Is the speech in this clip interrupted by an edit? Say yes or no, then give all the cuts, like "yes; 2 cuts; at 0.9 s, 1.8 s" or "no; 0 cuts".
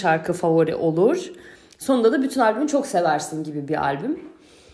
no; 0 cuts